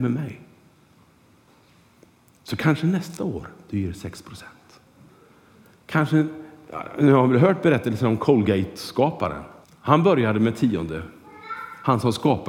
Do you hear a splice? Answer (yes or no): yes